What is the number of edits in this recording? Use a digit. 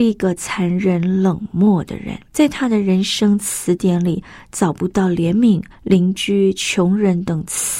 2